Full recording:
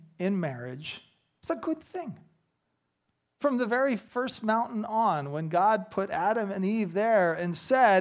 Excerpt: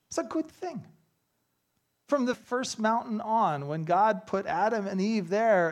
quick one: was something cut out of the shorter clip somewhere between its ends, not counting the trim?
yes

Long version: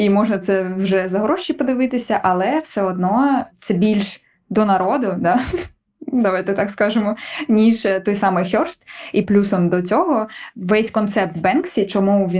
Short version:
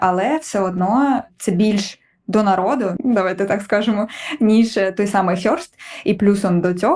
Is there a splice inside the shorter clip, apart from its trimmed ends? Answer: yes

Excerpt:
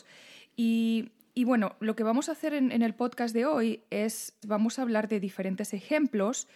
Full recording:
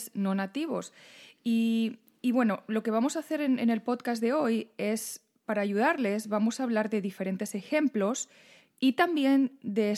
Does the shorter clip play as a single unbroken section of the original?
no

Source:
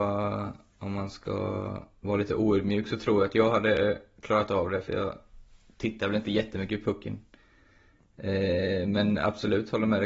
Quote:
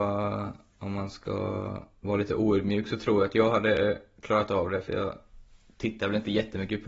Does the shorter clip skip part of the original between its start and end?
no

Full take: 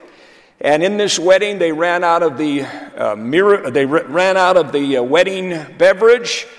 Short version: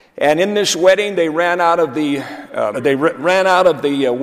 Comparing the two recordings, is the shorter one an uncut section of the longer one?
no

